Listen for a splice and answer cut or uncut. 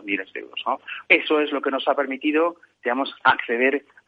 cut